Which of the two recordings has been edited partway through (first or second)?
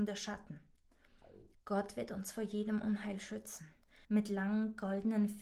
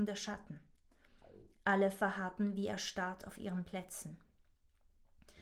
first